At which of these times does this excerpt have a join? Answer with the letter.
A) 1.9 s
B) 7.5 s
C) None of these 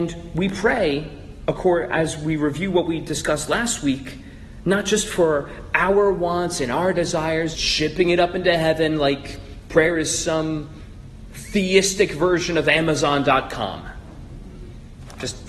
B